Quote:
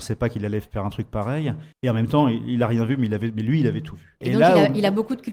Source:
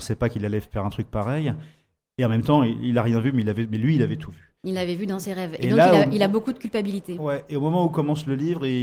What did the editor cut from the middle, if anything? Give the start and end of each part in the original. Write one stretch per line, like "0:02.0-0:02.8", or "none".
0:01.7-0:02.1
0:04.6-0:05.6

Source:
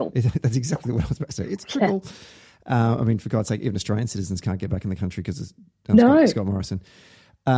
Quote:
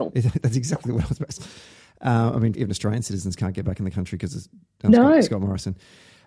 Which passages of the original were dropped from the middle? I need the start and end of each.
0:01.4-0:02.0
0:03.2-0:03.6

